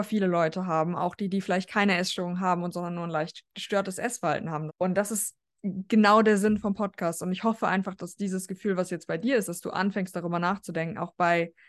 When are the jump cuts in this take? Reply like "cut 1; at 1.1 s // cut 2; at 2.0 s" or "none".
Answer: cut 1; at 4.7 s